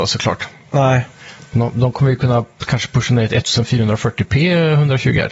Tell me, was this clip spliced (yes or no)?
no